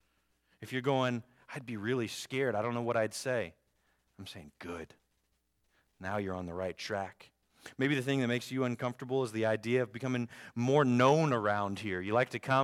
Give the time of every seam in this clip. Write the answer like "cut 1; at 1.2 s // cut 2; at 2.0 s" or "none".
none